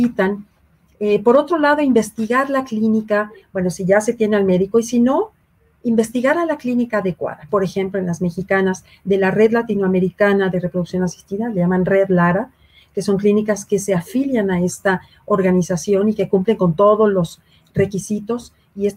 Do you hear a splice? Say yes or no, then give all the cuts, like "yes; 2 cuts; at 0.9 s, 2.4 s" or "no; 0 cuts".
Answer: yes; 1 cut; at 7.5 s